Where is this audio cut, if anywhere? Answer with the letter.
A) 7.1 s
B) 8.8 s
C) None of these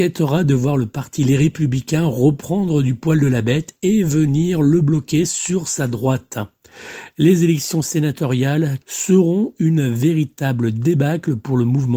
B